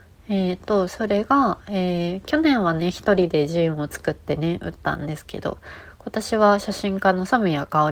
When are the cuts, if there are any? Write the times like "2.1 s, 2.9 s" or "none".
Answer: none